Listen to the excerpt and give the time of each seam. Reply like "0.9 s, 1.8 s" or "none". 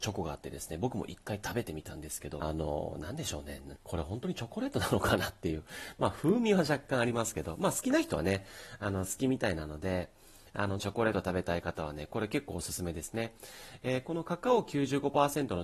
2.4 s, 3.8 s, 10.8 s